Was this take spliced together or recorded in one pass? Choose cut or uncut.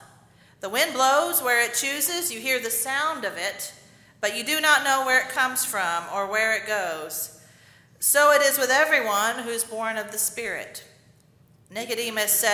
uncut